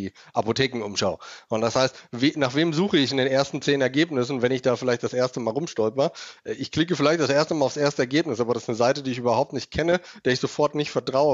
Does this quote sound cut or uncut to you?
uncut